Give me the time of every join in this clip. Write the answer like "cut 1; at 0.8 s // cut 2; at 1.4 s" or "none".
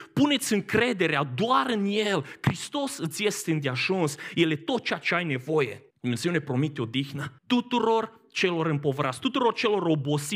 cut 1; at 5.9 s // cut 2; at 7.4 s